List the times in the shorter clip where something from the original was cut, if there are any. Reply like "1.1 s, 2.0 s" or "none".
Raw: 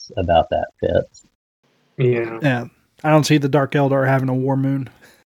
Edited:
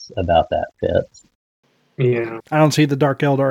2.4 s